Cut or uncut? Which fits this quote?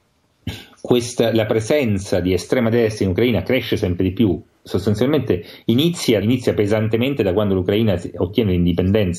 cut